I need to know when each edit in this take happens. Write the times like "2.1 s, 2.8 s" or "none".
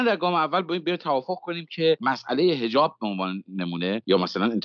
none